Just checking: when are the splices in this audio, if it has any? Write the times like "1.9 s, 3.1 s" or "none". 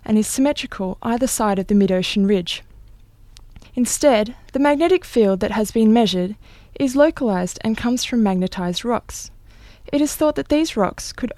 3.6 s